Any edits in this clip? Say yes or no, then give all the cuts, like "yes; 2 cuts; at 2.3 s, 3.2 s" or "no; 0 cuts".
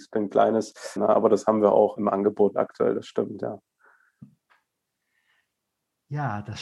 yes; 2 cuts; at 1.0 s, 2.0 s